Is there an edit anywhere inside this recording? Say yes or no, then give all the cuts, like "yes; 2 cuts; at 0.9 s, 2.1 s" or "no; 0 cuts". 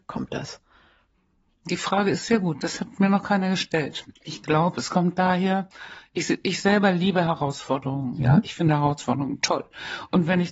yes; 1 cut; at 4.2 s